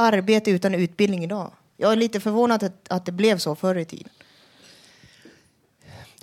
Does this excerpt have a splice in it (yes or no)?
no